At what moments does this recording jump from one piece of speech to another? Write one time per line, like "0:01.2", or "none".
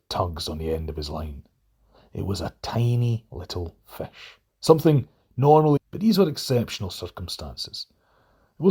0:04.5
0:05.8